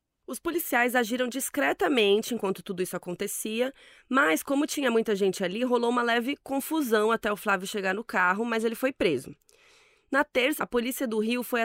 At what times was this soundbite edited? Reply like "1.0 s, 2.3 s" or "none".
10.6 s